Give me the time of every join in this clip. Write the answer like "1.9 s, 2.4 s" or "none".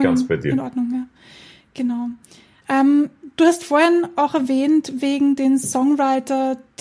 none